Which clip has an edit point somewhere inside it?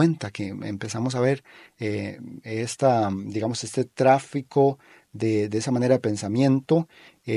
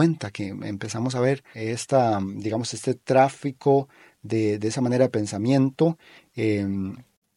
second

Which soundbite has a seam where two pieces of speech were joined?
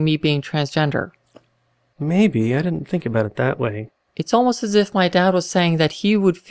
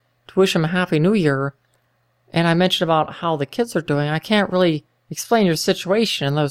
first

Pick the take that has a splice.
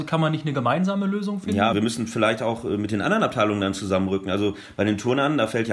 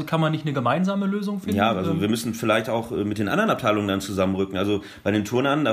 first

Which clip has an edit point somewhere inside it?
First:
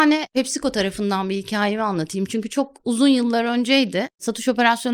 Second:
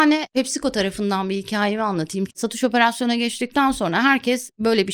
second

